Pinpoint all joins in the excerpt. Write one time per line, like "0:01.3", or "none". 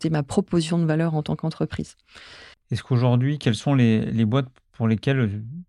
0:02.5